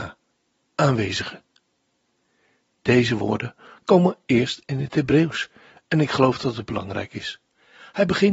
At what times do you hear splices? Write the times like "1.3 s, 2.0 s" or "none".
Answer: none